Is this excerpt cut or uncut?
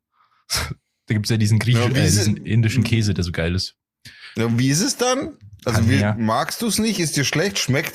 uncut